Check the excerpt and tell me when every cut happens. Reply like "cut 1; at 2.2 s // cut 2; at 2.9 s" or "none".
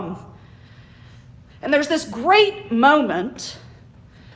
cut 1; at 1.5 s